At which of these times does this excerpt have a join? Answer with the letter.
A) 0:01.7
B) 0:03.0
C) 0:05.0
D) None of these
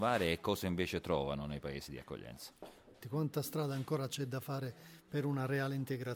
B